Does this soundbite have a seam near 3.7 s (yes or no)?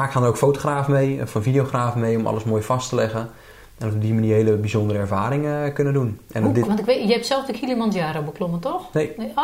no